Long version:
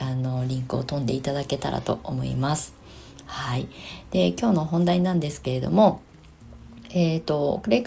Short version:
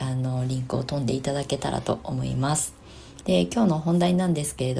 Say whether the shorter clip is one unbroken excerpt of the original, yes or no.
no